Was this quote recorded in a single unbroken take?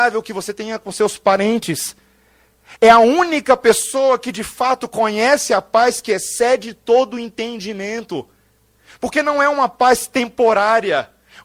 no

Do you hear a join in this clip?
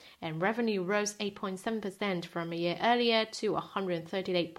no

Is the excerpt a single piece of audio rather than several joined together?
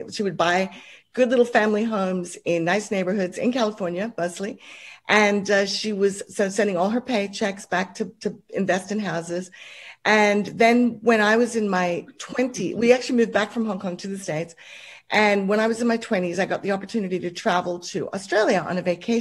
yes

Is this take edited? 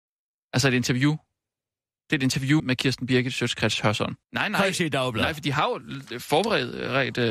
yes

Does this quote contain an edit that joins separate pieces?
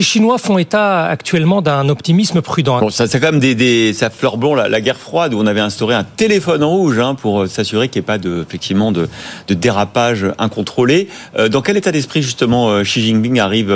yes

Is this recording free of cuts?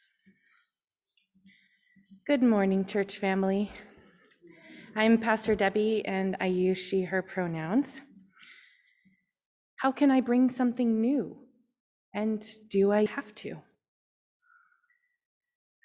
no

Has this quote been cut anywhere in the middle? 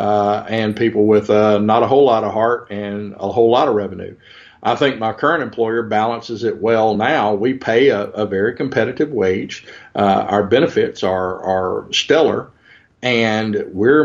no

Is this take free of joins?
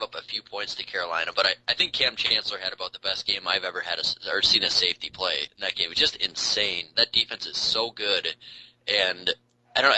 no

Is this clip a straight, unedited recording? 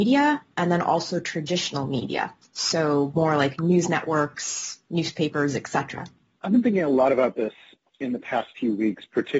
yes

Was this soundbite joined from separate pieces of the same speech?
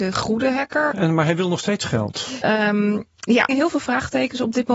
yes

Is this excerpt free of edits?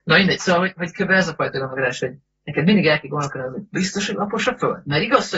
yes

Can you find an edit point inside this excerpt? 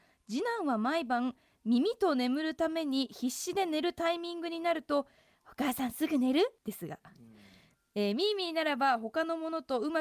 yes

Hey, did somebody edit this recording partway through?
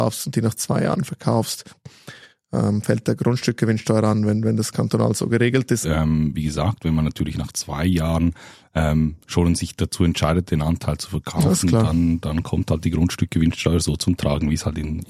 yes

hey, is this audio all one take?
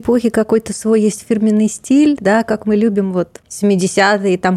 yes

